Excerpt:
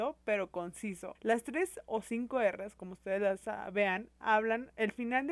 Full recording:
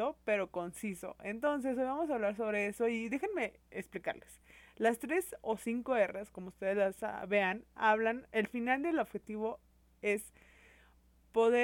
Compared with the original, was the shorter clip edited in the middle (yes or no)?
yes